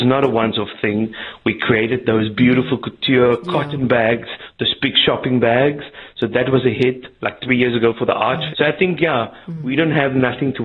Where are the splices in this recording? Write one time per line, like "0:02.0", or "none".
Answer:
0:08.5